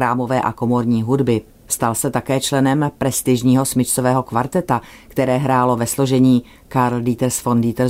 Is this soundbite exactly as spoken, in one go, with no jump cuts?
yes; 0 cuts

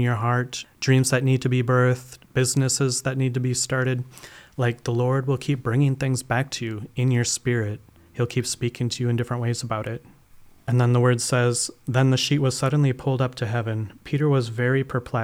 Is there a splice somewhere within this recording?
no; 0 cuts

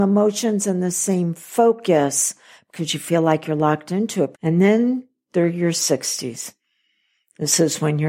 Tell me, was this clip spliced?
yes; 1 cut; at 4.3 s

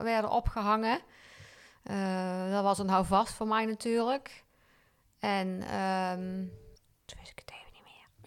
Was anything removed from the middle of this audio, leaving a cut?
no; 0 cuts

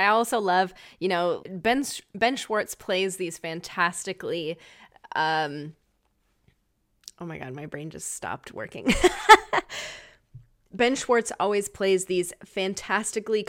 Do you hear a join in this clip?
yes; 1 cut; at 1.4 s

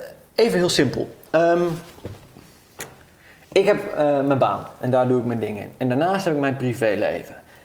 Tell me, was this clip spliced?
no; 0 cuts

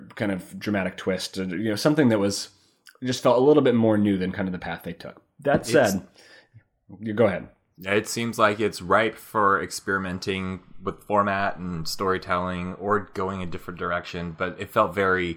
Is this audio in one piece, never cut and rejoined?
yes; 0 cuts

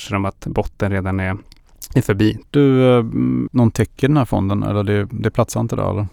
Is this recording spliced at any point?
yes; 2 cuts; at 2.4 s, 3.5 s

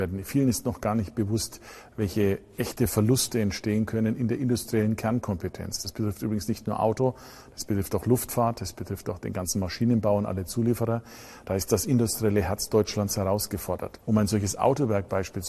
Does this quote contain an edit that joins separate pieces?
yes; 1 cut; at 14.0 s

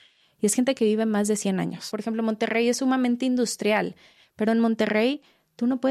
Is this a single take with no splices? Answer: no; 1 cut; at 1.9 s

